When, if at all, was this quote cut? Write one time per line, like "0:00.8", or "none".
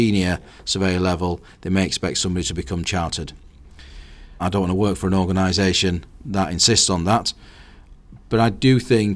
0:04.4